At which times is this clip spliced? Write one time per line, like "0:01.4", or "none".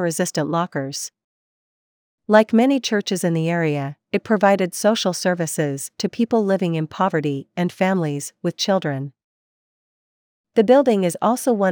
0:02.1